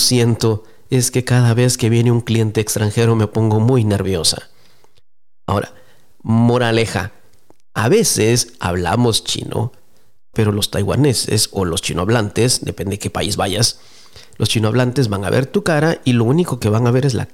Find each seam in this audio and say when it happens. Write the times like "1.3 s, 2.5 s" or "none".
10.3 s